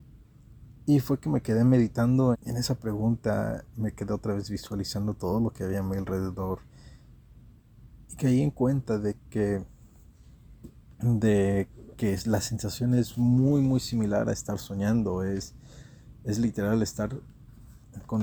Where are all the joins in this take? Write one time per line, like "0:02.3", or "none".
0:02.3